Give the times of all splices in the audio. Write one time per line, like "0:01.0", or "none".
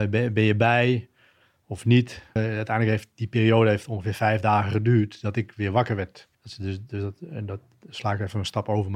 0:02.4
0:06.3